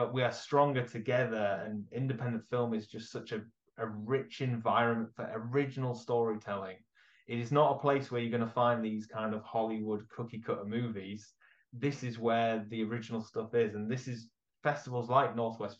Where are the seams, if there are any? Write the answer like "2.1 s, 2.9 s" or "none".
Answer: none

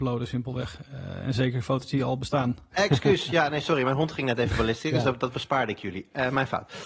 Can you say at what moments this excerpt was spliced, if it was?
2.7 s

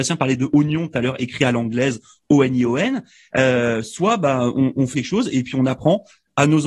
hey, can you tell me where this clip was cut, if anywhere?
3.3 s, 4.9 s

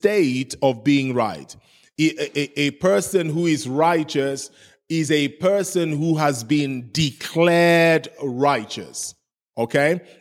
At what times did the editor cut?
none

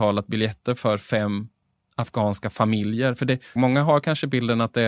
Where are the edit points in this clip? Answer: 3.6 s

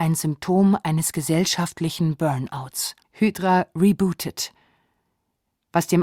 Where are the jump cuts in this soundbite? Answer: 3.0 s

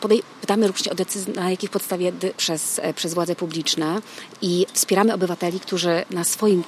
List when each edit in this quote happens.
2.3 s

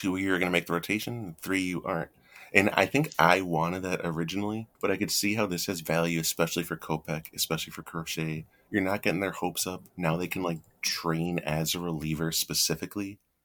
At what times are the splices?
4.8 s

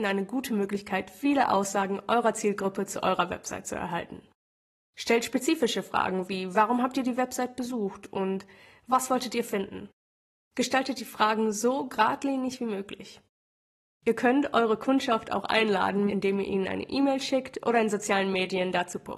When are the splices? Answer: 16.1 s

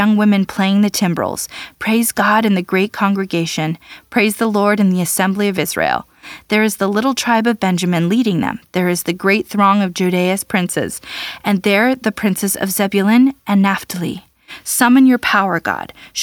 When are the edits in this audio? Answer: none

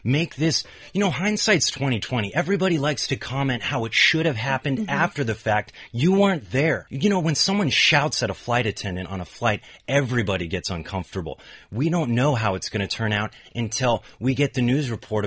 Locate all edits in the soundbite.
6.9 s

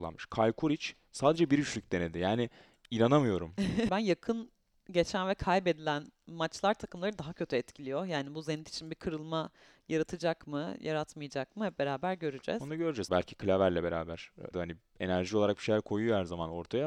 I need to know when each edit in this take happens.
3.9 s, 13.1 s, 14.5 s

